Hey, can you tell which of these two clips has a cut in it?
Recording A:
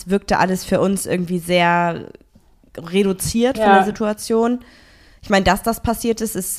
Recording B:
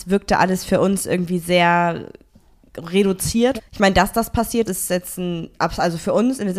B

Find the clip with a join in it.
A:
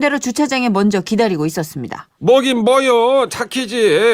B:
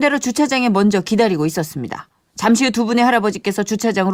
A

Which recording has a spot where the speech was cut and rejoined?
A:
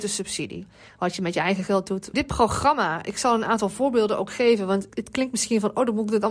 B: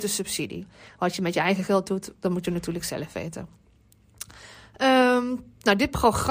A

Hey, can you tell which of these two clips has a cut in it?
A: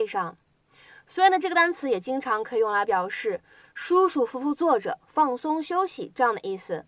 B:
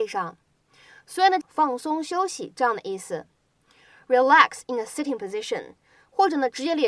B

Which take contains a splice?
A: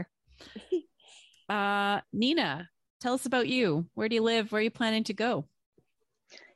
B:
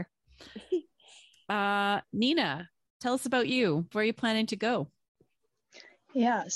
B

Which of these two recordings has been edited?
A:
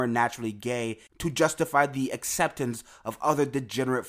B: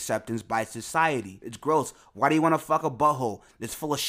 B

